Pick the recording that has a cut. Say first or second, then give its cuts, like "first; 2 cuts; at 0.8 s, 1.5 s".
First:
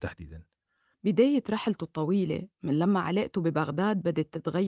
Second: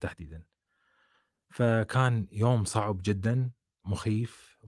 first; 1 cut; at 0.9 s